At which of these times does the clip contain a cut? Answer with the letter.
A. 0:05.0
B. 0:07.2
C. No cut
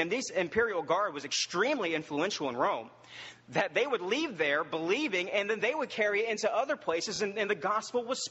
C